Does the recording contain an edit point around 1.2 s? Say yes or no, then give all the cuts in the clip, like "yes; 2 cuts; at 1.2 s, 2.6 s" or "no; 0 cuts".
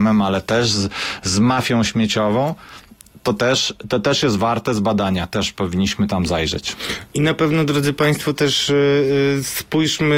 no; 0 cuts